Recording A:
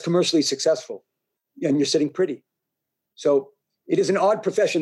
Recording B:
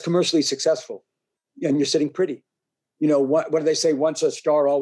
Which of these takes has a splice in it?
B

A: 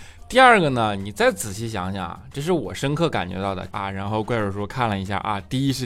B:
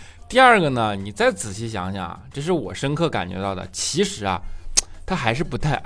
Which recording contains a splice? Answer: A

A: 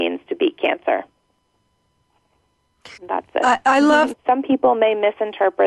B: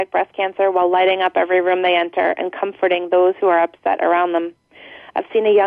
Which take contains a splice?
A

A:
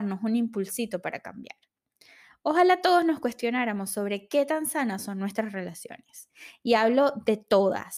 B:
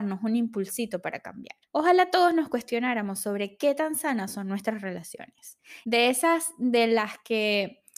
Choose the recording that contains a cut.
B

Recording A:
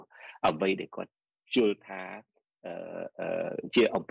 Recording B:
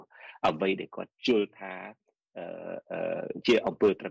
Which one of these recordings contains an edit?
B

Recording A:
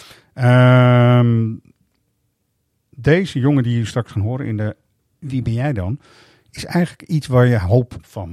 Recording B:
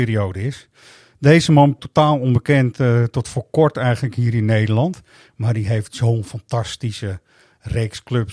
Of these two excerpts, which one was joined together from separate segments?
B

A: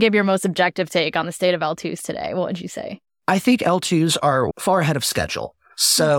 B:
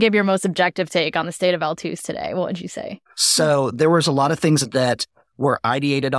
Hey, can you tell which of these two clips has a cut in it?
B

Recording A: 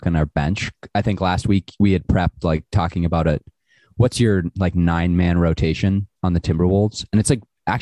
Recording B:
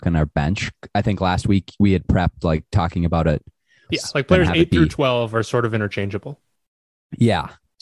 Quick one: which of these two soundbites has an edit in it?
B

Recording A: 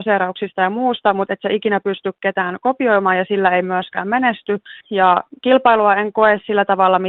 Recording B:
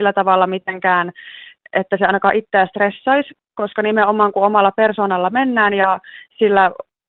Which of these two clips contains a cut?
A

